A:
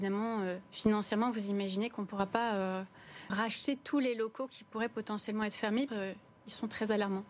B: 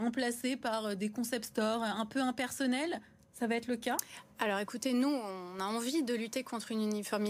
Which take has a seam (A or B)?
A